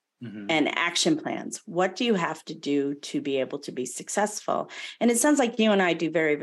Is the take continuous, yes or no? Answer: yes